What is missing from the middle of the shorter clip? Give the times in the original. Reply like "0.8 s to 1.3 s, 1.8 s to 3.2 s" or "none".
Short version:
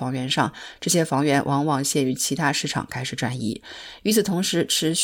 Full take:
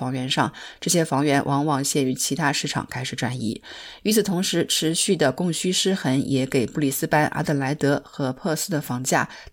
none